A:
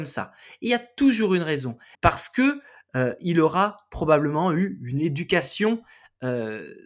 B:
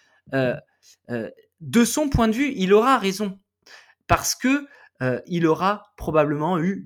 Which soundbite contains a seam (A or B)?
A